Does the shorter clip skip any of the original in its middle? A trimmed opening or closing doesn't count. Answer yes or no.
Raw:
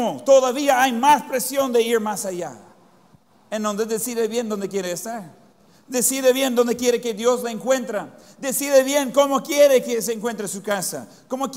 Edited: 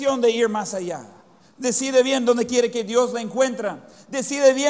yes